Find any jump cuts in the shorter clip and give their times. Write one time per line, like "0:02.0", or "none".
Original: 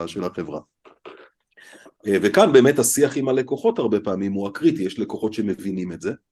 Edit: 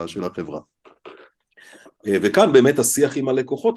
none